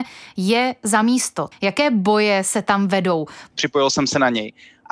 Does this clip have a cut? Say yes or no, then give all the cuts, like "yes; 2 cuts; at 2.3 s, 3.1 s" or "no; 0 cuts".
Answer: yes; 2 cuts; at 1.5 s, 3.5 s